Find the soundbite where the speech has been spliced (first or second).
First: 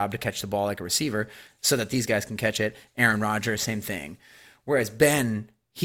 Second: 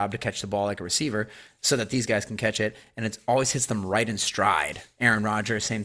first